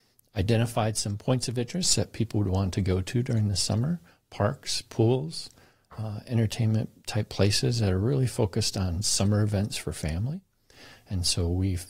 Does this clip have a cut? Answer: no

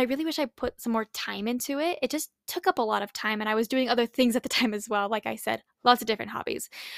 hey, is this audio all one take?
yes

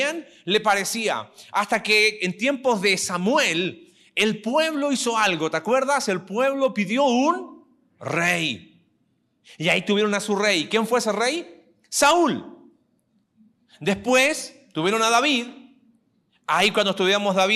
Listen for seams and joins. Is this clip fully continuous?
yes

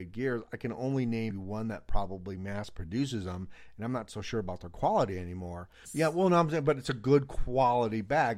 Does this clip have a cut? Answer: yes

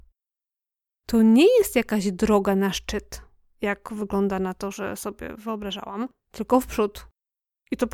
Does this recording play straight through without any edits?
yes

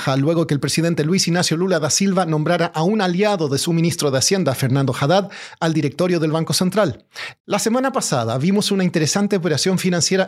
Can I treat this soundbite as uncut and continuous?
no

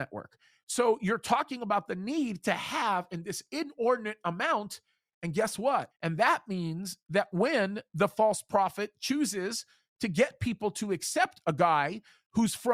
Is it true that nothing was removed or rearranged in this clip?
no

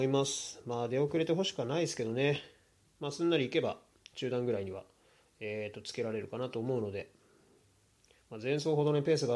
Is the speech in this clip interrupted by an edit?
no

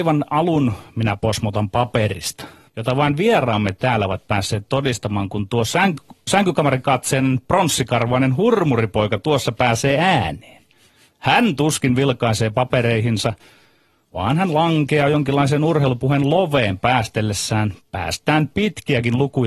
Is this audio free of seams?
no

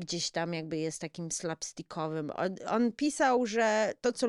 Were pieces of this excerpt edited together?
no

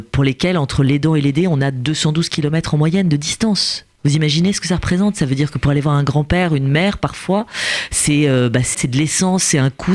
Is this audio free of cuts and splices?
no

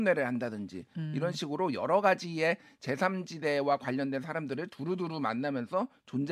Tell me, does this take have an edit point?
no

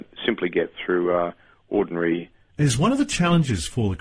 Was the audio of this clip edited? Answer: yes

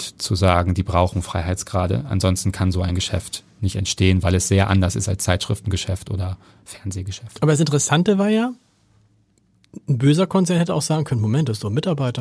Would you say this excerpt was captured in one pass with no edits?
yes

